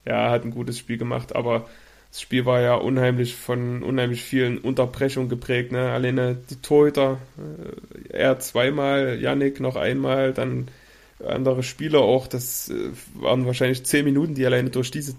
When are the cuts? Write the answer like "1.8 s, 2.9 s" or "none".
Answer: none